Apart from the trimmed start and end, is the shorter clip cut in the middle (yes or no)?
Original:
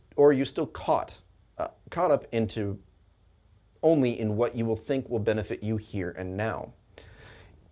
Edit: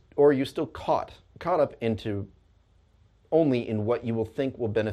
yes